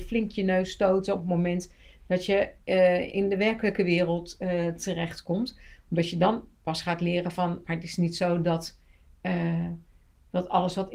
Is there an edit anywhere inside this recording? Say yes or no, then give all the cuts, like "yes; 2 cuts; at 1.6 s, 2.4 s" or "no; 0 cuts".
yes; 2 cuts; at 3.1 s, 7.6 s